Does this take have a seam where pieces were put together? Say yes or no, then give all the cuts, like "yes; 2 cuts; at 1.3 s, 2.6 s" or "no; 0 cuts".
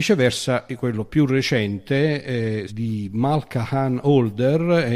yes; 1 cut; at 2.7 s